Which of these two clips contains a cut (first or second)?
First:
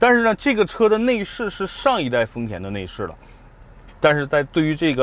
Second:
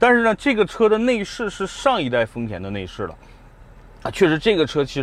first